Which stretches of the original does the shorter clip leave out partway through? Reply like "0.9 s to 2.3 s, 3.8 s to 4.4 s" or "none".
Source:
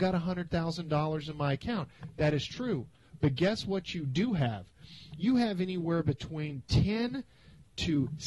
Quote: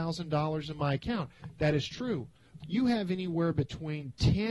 3.2 s to 5.1 s

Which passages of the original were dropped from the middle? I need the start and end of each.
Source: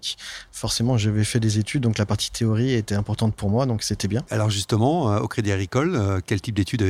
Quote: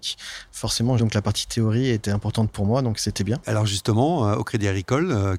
1.0 s to 1.8 s

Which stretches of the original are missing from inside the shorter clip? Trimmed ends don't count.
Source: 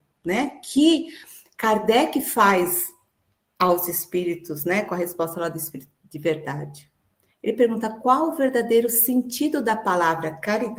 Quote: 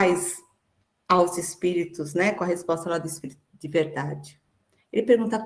none

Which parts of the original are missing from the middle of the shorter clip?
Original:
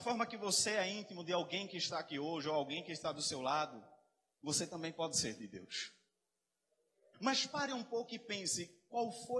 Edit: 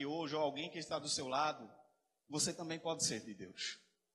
none

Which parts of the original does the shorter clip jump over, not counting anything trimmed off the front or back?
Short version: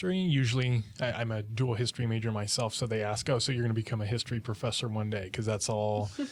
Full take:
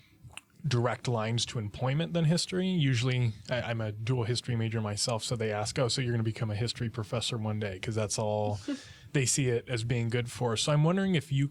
none

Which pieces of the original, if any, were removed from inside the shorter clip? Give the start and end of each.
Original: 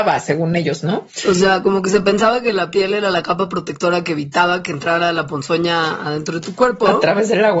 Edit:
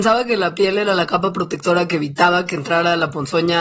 none

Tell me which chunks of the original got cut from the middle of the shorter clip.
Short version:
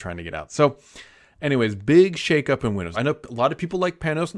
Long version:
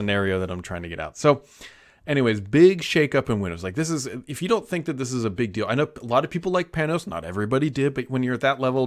3.6 s to 5.7 s

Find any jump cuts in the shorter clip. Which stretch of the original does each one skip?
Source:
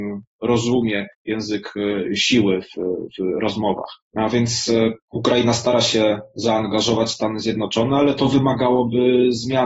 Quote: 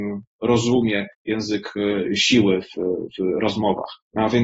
none

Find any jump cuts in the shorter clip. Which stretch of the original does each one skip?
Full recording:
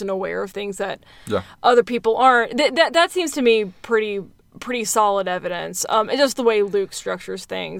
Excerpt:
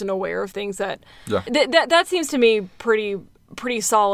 1.5 s to 2.5 s

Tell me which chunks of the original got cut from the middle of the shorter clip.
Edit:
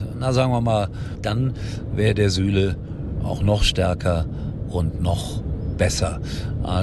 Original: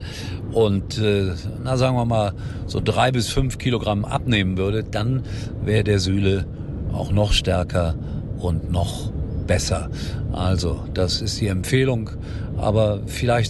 2.6 s to 4.8 s

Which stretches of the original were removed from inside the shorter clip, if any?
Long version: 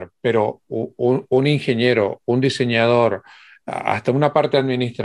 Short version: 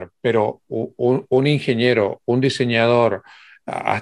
none

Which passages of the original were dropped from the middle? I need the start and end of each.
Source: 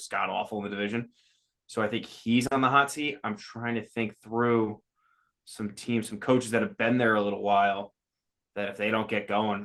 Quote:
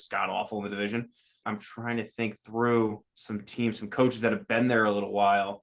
1.4 s to 3.2 s, 4.8 s to 5.4 s

